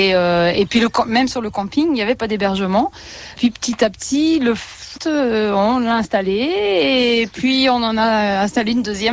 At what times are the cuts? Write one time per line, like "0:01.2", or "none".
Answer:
0:05.0